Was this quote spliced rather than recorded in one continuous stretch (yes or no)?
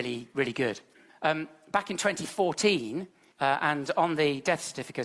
yes